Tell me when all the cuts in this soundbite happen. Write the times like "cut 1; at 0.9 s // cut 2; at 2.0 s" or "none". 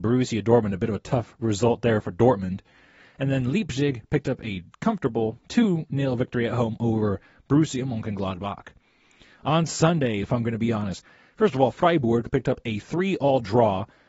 cut 1; at 10.2 s